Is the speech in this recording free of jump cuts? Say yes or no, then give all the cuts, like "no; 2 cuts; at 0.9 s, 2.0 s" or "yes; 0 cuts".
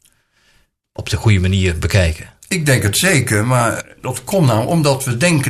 yes; 0 cuts